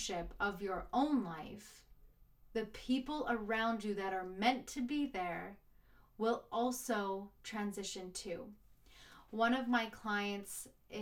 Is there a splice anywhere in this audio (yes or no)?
no